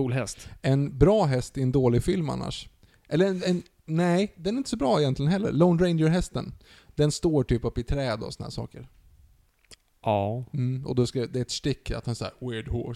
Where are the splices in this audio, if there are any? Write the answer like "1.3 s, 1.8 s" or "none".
none